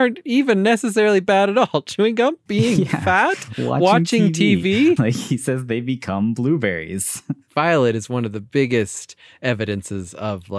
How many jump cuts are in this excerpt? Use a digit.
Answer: 1